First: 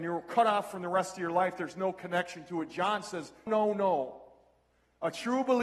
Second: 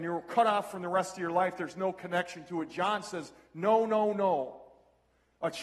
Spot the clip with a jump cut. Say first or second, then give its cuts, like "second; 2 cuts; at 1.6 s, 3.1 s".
first; 1 cut; at 3.5 s